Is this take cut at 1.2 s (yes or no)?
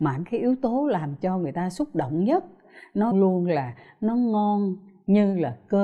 no